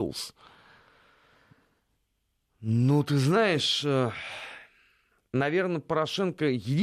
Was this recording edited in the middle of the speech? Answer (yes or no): no